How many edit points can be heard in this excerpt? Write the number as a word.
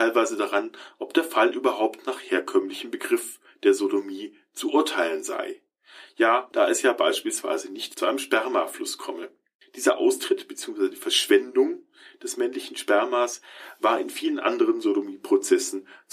one